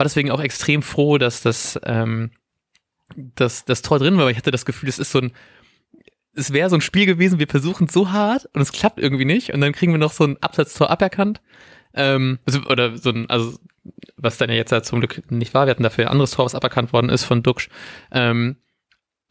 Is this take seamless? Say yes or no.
yes